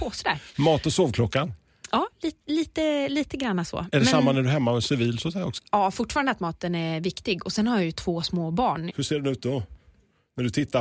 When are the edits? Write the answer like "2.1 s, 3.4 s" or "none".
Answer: 5.6 s, 8.9 s